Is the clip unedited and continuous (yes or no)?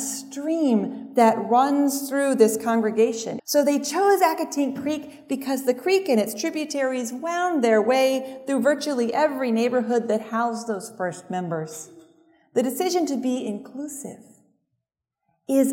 no